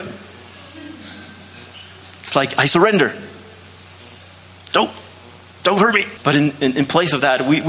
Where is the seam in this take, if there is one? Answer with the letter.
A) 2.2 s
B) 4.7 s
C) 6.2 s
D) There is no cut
C